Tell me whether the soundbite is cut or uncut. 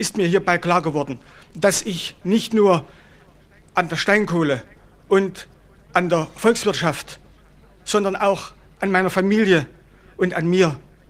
uncut